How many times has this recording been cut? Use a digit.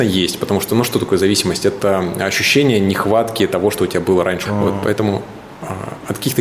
1